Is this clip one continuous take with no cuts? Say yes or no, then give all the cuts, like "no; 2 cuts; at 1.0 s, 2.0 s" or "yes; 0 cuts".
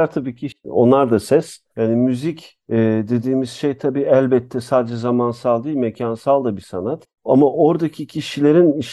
no; 1 cut; at 1.7 s